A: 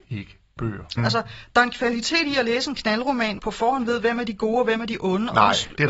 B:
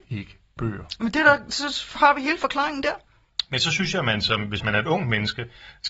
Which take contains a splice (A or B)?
A